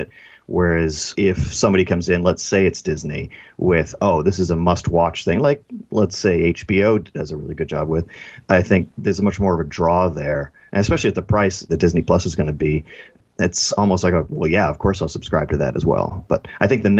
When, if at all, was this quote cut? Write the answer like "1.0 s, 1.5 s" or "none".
none